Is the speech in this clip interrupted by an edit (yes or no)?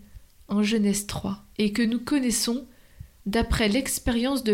yes